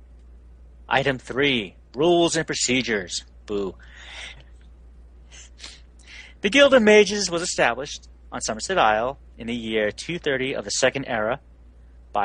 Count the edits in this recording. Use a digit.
1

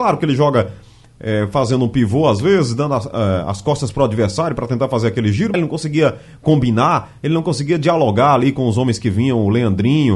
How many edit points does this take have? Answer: 1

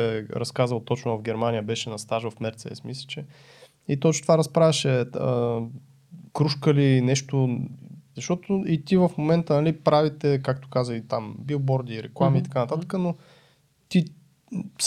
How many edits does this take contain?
2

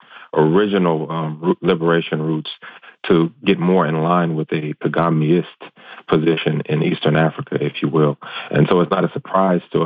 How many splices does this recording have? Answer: 0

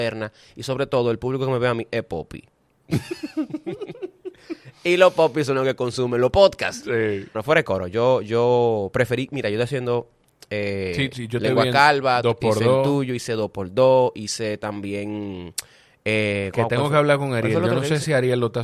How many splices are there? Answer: 1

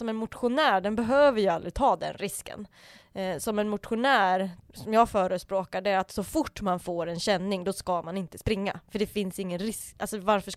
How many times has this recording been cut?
1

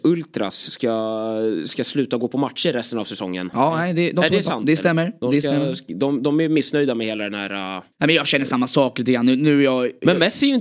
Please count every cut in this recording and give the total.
1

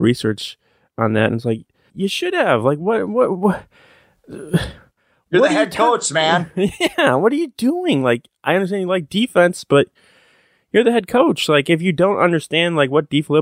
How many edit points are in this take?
1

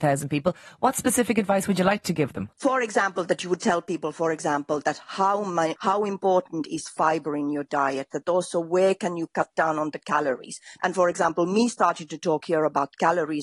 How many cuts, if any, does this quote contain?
3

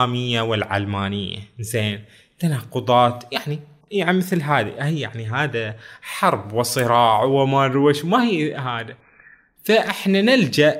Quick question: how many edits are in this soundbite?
0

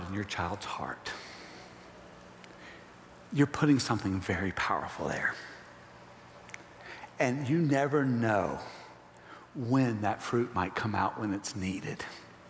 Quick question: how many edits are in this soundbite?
0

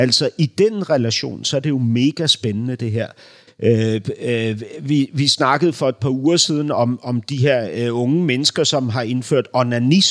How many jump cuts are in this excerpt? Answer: 1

